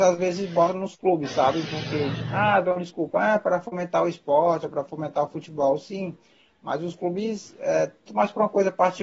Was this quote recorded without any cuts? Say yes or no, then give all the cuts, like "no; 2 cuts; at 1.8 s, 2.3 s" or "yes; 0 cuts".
no; 1 cut; at 8.1 s